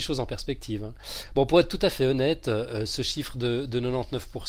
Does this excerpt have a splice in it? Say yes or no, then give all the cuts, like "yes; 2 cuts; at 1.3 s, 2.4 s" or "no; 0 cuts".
no; 0 cuts